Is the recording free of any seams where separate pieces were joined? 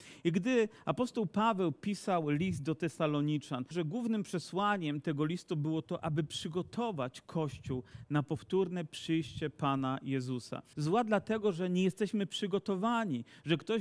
no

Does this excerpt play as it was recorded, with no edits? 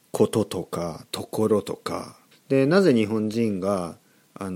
no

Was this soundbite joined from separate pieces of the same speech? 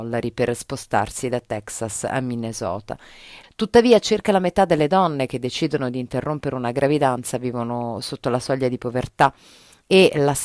yes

